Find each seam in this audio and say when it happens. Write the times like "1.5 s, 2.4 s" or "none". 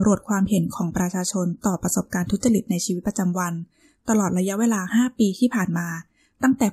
none